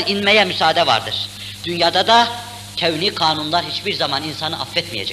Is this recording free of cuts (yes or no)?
no